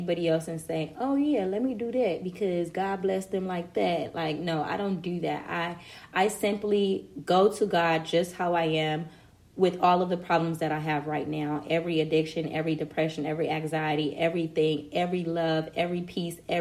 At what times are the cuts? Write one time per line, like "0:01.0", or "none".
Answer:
none